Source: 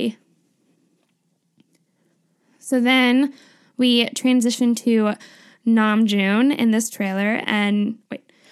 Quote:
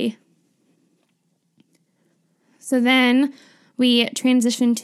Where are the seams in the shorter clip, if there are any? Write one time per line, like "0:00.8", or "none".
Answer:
none